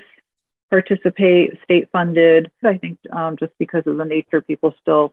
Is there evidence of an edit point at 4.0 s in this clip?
no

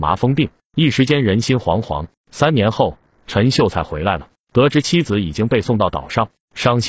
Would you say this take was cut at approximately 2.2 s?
yes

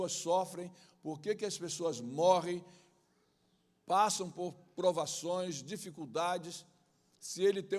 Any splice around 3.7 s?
no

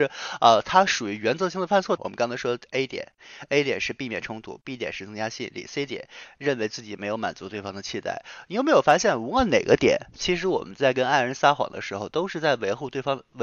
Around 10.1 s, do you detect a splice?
no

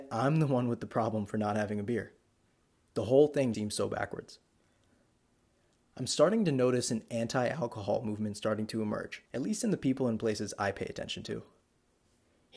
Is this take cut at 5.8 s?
no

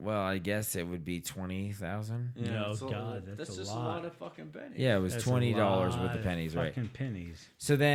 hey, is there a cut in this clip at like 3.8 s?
no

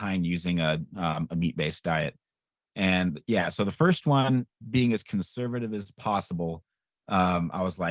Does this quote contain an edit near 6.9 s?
no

